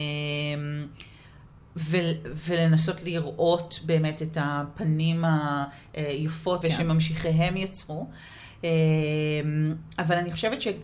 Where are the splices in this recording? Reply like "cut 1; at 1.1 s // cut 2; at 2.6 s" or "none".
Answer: cut 1; at 6.6 s